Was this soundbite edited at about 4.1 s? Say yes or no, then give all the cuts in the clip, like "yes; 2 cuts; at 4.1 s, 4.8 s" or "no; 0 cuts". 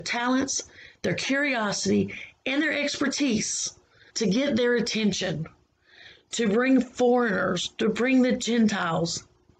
yes; 1 cut; at 4.1 s